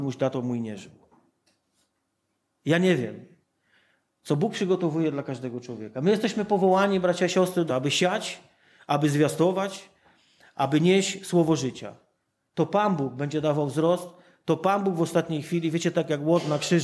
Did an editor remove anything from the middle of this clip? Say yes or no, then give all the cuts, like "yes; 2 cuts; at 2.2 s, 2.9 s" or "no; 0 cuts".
yes; 1 cut; at 7.7 s